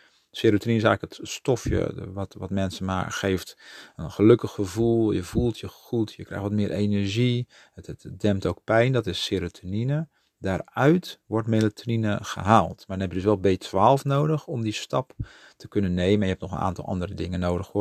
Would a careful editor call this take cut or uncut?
uncut